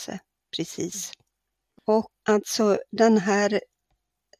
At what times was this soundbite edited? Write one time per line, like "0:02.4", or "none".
0:02.2